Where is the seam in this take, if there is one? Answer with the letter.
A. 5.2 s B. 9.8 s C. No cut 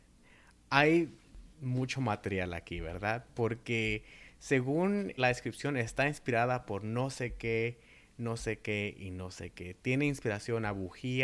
A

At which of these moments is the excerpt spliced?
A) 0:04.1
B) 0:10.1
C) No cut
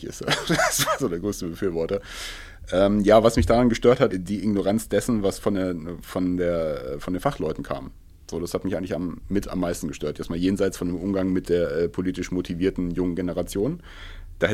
A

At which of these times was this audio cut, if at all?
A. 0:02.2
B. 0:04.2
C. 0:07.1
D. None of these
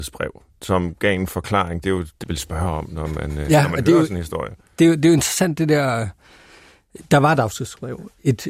A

